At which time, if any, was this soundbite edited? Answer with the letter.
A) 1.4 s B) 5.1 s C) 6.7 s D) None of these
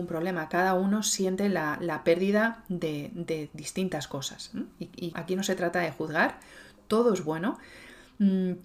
B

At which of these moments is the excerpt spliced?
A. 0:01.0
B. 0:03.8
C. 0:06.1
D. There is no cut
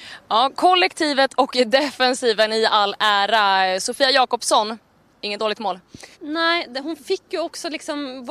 C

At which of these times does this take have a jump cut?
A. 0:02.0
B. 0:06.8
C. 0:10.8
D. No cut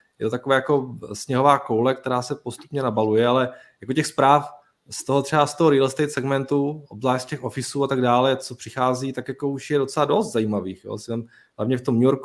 D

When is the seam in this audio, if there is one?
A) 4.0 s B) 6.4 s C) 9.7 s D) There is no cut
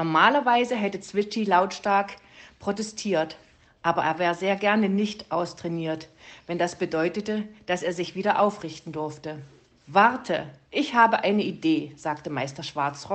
D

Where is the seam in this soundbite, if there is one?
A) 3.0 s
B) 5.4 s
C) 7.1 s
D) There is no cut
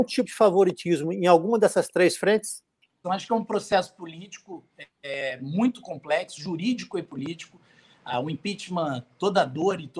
A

